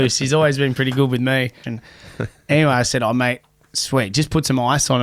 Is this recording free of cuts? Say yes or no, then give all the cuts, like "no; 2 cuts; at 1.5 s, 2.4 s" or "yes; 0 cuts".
no; 1 cut; at 1.6 s